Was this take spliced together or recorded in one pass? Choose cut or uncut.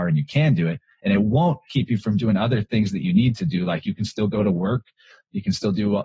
uncut